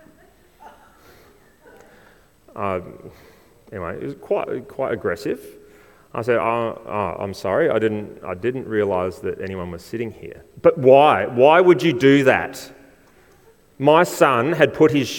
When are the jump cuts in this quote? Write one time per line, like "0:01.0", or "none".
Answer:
none